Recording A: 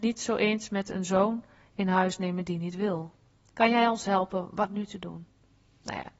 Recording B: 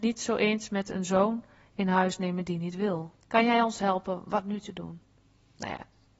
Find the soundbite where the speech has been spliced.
B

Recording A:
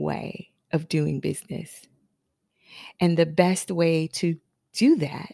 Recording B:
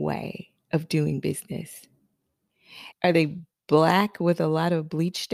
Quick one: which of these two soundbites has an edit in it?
B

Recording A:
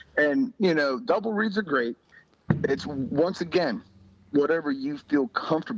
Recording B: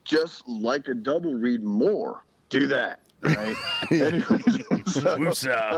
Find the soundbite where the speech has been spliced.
B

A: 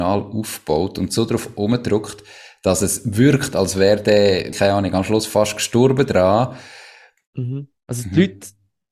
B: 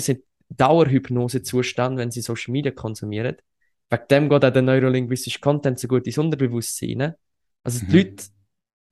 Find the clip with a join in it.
A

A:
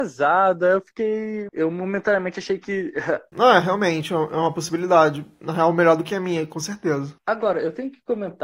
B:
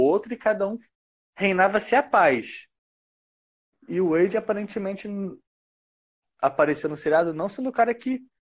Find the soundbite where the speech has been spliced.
A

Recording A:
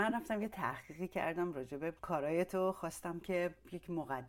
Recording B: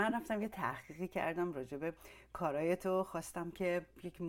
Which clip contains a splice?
A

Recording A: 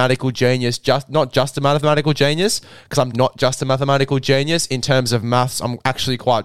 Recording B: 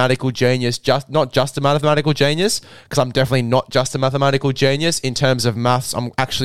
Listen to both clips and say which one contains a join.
A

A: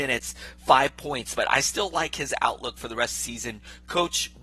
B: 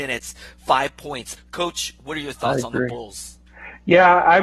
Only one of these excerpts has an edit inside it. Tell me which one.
B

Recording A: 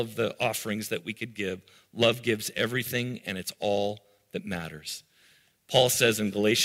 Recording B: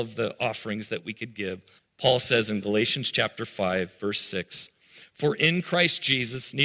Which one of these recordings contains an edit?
B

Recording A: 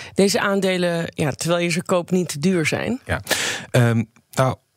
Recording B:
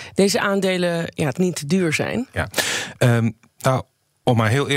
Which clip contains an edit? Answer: B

